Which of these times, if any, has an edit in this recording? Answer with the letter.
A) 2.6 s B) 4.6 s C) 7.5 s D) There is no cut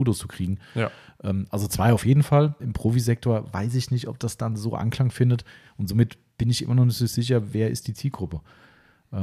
A